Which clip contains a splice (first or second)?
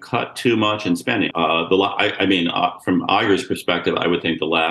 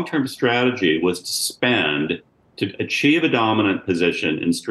first